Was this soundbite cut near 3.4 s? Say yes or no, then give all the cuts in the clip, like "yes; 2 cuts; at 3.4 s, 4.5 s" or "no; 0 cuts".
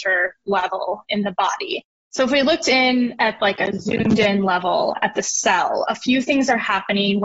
no; 1 cut; at 1.9 s